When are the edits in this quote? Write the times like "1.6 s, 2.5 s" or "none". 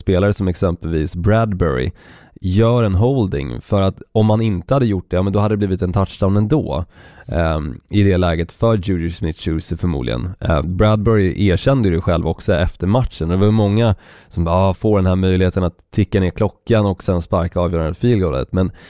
10.6 s, 14.7 s